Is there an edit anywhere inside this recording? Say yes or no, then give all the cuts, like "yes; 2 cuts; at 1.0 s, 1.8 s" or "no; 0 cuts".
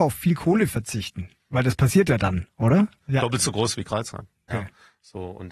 yes; 2 cuts; at 3.0 s, 4.5 s